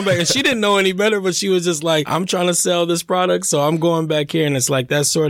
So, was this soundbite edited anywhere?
no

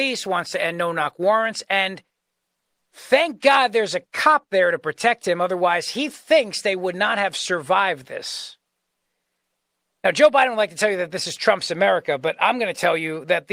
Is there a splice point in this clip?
no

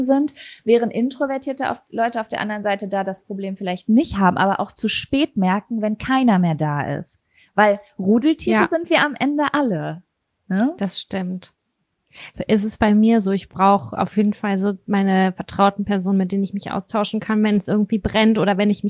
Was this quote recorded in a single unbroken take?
no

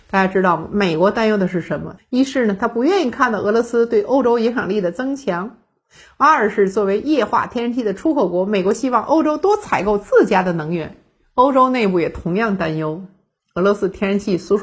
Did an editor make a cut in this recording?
yes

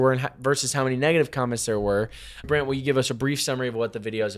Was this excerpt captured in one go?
no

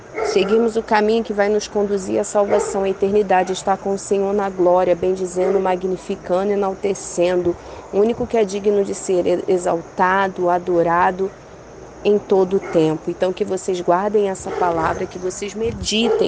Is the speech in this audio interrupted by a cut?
no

